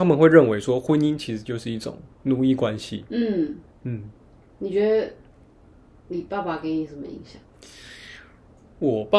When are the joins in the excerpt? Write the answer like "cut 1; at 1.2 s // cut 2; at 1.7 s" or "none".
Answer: none